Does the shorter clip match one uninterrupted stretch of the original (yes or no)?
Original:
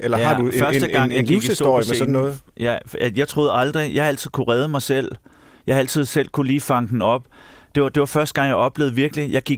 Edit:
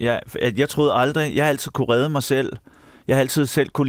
yes